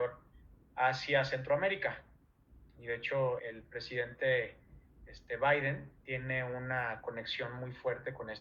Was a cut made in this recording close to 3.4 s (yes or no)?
yes